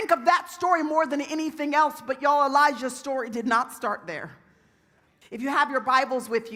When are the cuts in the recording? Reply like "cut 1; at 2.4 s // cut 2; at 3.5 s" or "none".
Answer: cut 1; at 5.2 s